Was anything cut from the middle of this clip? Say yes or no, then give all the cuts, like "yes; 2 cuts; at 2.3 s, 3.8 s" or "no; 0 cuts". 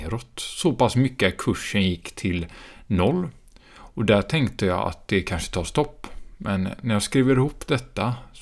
no; 0 cuts